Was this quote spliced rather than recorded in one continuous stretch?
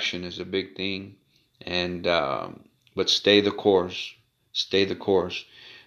no; 0 cuts

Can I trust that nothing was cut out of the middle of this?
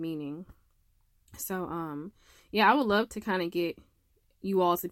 yes; 0 cuts

